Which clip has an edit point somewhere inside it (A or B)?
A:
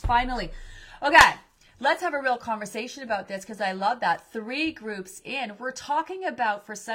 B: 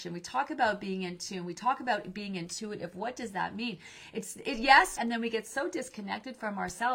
B